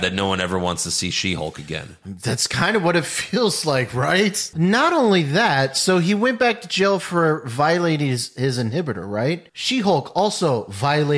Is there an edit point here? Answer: yes; 2 cuts; at 4.5 s, 9.5 s

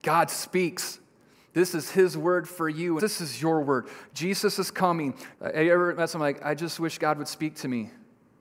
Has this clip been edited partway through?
yes; 3 cuts; at 3.0 s, 4.1 s, 5.3 s

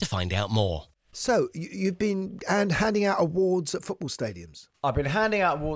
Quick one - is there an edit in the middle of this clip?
no; 0 cuts

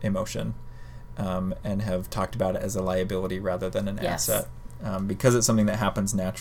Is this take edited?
no; 0 cuts

